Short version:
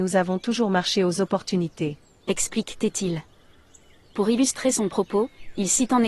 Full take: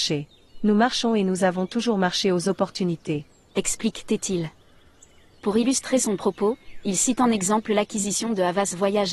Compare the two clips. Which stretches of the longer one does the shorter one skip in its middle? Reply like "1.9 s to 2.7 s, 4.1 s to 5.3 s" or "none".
none

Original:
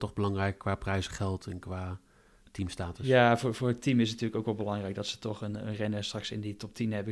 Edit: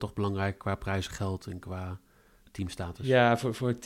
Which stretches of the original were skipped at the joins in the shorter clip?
none

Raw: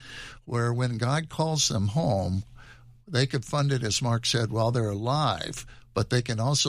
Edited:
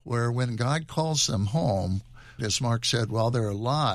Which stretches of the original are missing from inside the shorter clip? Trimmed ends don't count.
2.8 s to 3.8 s

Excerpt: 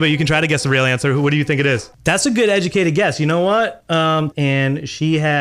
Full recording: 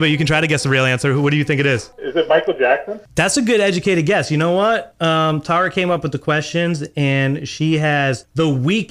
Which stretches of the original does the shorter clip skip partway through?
1.9 s to 3.0 s, 5.4 s to 6.9 s

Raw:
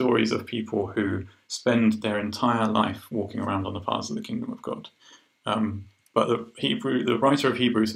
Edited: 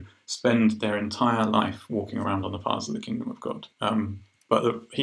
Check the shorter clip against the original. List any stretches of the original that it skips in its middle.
4.9 s to 5.4 s

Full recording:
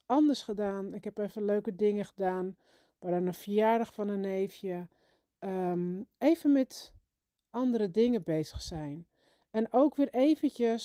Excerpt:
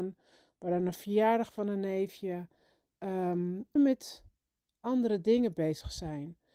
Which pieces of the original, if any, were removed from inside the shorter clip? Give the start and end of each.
6.2 s to 6.5 s

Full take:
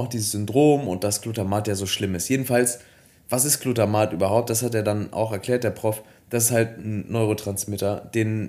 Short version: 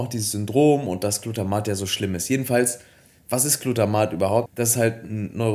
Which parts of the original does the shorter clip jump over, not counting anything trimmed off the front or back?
4.5 s to 6.2 s

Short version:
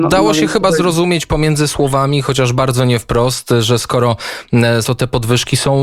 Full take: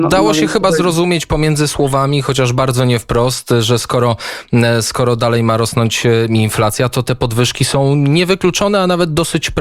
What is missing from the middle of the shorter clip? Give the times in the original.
4.8 s to 6.9 s

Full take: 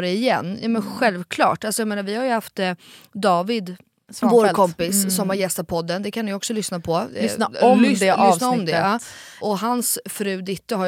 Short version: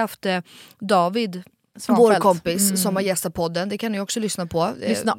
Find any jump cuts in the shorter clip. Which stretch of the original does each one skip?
none

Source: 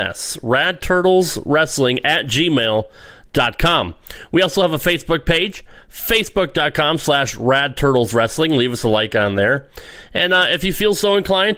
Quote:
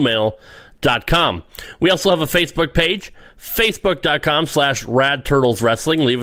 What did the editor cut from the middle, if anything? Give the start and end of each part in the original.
none

